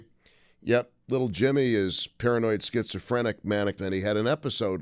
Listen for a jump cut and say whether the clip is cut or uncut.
cut